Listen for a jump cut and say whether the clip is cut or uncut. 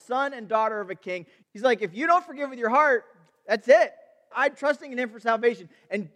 cut